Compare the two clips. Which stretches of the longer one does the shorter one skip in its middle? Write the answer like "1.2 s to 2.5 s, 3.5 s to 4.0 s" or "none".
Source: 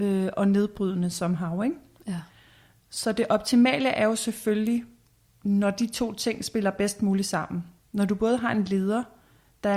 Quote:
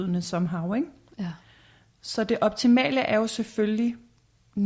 none